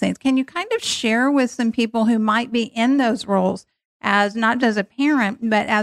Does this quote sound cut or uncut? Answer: cut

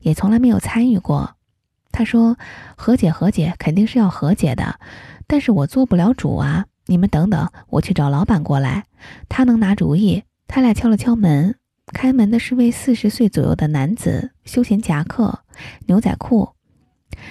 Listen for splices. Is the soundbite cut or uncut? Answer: cut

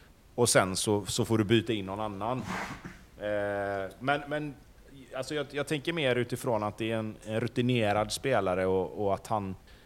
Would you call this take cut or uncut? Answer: cut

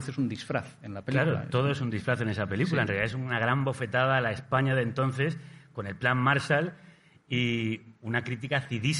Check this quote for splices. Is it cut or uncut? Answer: uncut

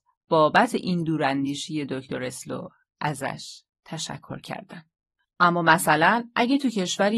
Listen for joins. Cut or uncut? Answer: cut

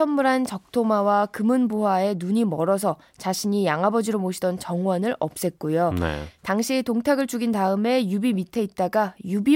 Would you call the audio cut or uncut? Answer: uncut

